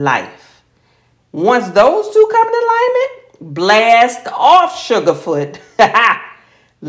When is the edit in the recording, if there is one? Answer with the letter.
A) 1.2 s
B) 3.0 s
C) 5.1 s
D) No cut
A